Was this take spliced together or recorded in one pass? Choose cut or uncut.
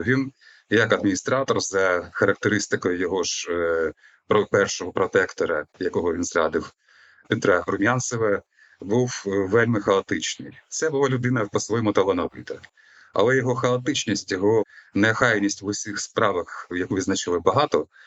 uncut